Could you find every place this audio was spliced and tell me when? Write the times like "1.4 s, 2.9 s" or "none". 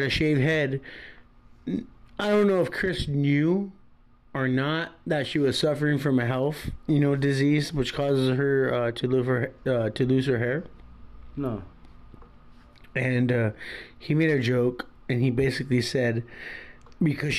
none